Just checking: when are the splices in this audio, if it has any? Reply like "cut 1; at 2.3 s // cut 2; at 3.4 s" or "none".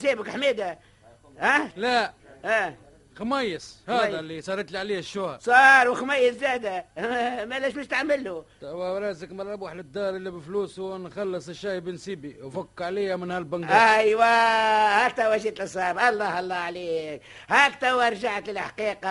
cut 1; at 1.7 s